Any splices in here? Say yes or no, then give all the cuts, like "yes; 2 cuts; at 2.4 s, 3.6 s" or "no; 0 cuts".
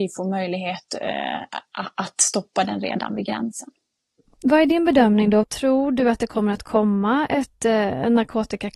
yes; 1 cut; at 5.4 s